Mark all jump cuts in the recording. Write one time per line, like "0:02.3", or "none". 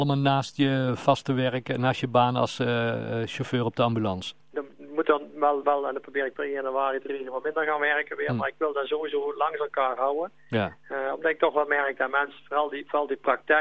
0:04.5